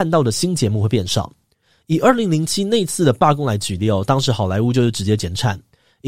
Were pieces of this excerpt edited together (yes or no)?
no